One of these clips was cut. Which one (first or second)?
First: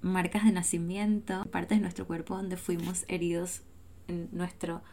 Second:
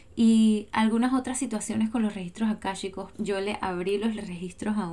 second